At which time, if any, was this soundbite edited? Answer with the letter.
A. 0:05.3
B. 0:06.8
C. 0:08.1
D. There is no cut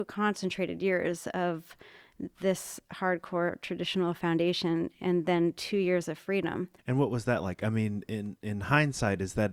B